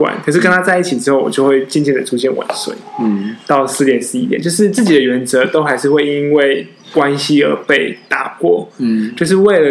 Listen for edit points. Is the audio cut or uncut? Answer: uncut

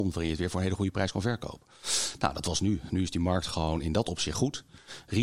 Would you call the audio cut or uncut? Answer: uncut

